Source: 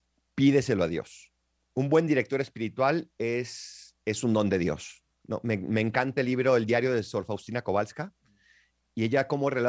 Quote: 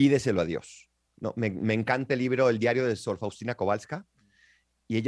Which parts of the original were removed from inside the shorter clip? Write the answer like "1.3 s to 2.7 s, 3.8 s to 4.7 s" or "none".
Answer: 1.5 s to 5.1 s